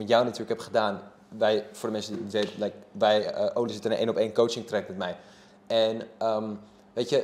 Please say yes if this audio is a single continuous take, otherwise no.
no